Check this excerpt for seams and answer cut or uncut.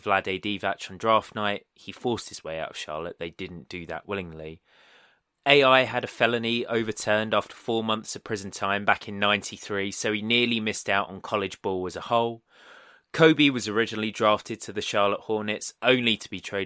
cut